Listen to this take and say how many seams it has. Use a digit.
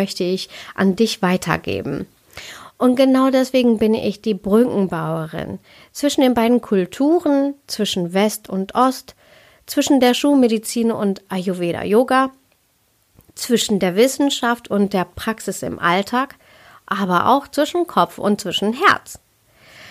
0